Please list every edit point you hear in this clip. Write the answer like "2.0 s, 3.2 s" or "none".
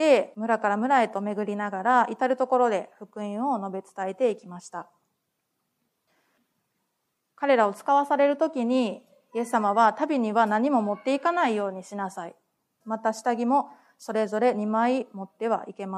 12.8 s